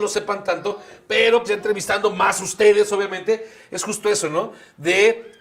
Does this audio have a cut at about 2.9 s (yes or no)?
no